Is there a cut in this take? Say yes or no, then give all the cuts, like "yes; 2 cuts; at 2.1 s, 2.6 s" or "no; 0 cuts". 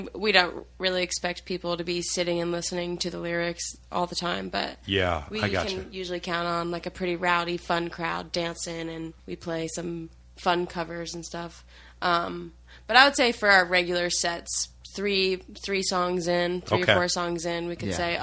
yes; 1 cut; at 9.2 s